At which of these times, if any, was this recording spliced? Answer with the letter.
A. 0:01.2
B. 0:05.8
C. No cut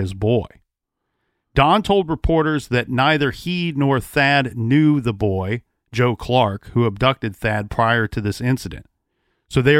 C